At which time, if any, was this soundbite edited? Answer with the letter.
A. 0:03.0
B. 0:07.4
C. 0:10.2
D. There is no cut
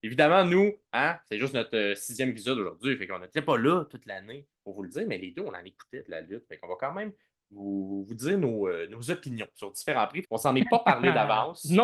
C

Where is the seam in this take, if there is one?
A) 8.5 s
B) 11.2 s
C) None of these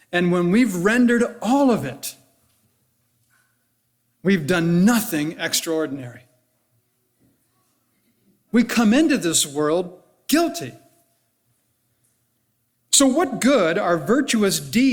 A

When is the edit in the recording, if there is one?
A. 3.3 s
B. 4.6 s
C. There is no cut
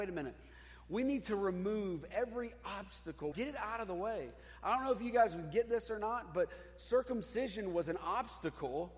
A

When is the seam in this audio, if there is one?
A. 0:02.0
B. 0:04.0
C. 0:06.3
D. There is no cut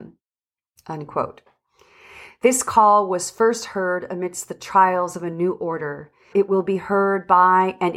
C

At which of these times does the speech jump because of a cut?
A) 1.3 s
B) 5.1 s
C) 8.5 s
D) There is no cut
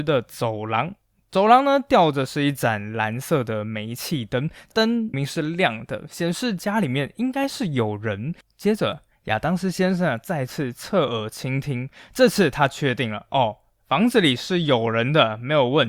B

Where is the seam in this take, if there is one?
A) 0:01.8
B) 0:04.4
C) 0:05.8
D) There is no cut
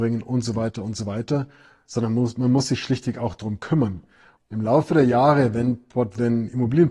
B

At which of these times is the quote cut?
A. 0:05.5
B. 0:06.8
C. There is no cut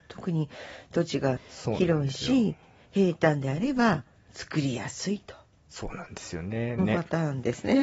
B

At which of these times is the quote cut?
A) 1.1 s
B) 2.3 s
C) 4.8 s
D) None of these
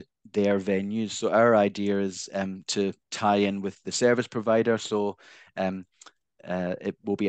D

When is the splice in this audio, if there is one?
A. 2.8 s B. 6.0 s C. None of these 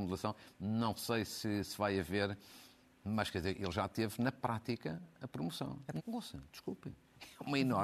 B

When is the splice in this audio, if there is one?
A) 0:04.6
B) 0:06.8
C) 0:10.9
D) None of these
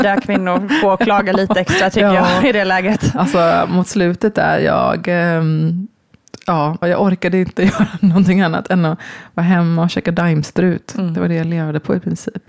B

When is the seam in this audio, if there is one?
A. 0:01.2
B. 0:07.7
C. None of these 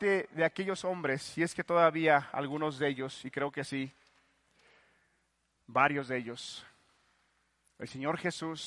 C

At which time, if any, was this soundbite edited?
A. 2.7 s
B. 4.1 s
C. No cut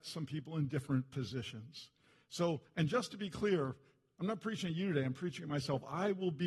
C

